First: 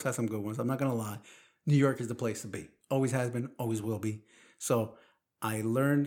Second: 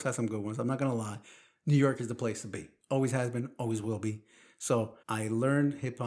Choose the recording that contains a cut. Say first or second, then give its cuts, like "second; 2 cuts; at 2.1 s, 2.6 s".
second; 1 cut; at 5.0 s